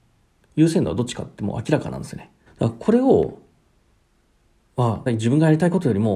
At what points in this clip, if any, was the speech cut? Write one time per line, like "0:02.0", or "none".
0:02.5
0:05.1